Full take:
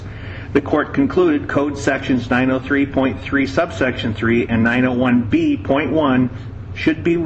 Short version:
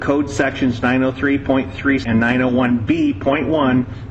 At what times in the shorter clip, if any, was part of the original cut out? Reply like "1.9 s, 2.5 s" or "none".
2.0 s